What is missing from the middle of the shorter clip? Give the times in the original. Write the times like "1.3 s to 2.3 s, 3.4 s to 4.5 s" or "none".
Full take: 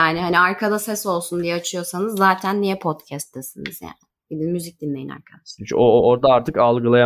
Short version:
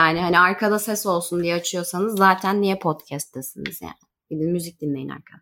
none